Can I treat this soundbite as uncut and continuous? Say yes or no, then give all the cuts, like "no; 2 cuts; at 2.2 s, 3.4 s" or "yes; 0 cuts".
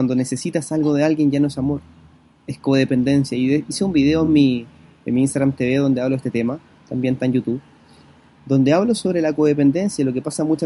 yes; 0 cuts